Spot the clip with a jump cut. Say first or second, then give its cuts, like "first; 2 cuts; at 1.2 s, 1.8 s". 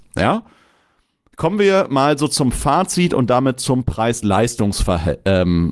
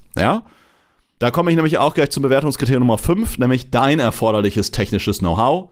second; 1 cut; at 1.2 s